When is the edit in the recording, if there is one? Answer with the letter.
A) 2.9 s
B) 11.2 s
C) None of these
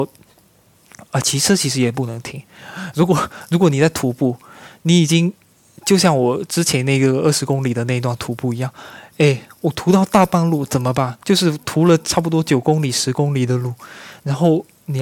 B